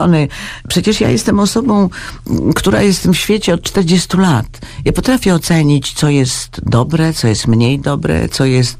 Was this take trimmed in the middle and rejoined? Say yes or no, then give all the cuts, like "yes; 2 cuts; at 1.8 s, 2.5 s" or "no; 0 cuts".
no; 0 cuts